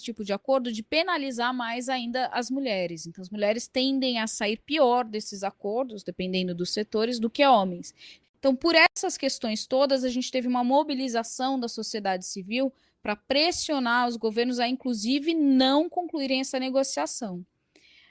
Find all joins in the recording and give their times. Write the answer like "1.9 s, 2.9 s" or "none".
8.2 s